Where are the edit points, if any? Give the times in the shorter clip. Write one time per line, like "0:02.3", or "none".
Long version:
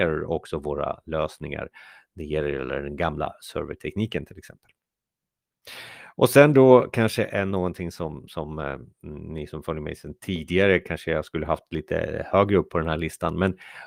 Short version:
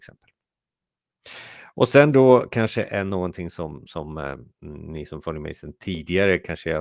none